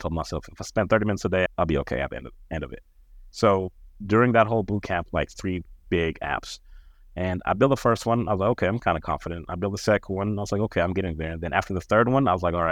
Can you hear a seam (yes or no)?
yes